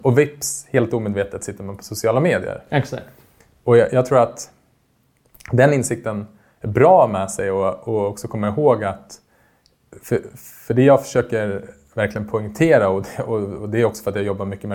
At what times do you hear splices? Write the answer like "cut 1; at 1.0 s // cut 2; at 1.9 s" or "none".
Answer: none